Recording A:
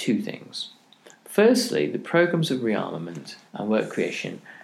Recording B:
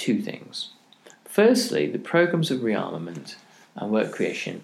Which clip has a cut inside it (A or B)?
A